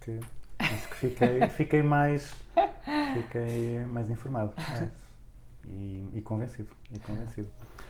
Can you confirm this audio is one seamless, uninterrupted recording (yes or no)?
yes